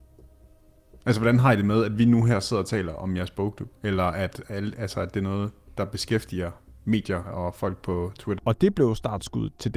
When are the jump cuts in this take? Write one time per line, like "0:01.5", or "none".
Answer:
0:03.8
0:08.4